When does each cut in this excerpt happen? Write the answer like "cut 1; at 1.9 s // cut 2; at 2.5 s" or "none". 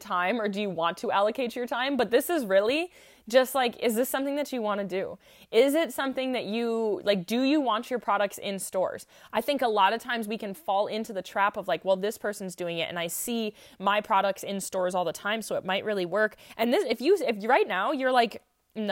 none